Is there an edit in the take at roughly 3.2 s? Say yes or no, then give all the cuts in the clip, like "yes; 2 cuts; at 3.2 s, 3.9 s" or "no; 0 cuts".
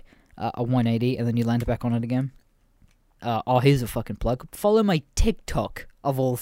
yes; 1 cut; at 3.2 s